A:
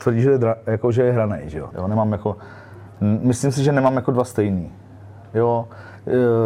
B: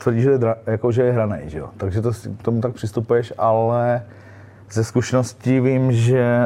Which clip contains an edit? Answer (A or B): A